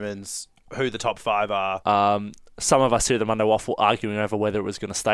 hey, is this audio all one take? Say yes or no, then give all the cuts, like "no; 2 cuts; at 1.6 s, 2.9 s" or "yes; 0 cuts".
no; 1 cut; at 1.8 s